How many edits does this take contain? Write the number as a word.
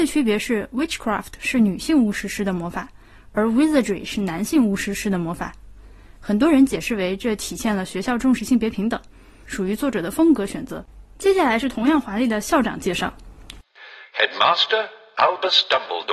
one